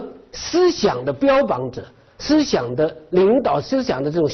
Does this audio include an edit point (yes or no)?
no